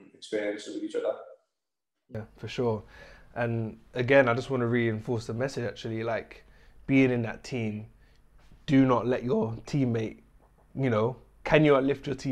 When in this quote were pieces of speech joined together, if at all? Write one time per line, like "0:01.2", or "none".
none